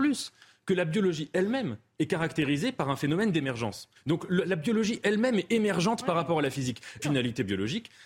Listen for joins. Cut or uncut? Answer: cut